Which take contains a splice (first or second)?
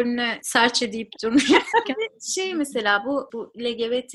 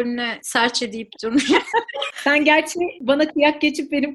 first